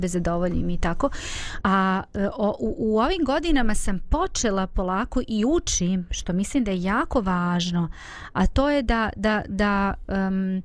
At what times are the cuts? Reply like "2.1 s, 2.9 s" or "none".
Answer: 1.6 s